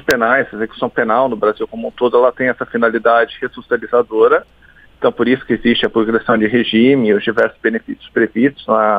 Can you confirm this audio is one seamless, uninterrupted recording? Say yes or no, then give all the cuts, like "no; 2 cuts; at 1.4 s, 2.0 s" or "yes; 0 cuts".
yes; 0 cuts